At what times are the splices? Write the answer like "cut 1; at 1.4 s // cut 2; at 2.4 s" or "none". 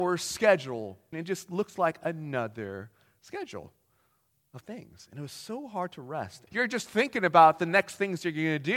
cut 1; at 1.1 s // cut 2; at 6.5 s